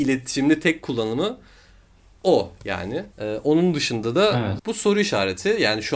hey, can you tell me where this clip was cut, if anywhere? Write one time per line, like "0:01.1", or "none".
0:03.1
0:04.6